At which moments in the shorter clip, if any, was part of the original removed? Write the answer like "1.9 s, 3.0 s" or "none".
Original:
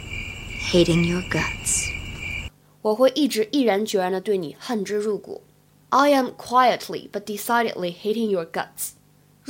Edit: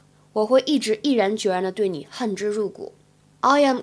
none